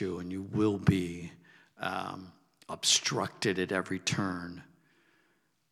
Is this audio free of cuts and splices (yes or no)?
yes